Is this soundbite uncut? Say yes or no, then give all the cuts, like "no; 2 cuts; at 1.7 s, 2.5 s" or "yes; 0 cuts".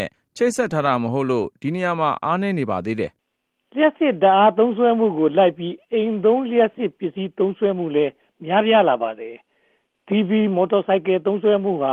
no; 1 cut; at 3.2 s